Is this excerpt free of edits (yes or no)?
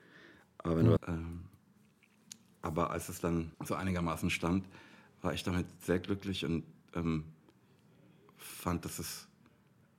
no